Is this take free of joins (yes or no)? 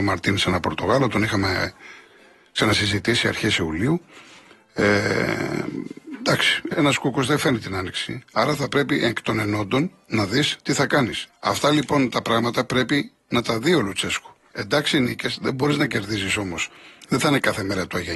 no